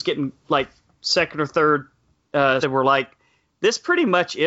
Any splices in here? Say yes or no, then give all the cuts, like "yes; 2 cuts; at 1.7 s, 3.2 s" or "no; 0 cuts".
yes; 1 cut; at 2.6 s